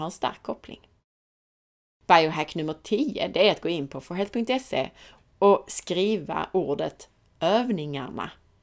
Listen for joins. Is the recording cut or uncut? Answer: uncut